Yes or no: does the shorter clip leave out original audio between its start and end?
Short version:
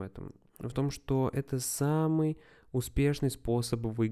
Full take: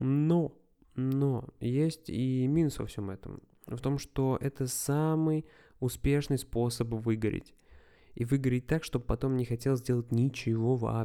no